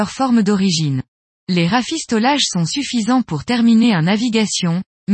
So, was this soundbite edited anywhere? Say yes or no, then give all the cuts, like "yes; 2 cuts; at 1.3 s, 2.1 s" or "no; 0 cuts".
yes; 1 cut; at 1.3 s